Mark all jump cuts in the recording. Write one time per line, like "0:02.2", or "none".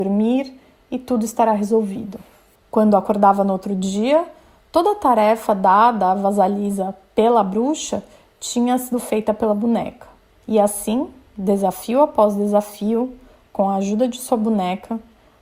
none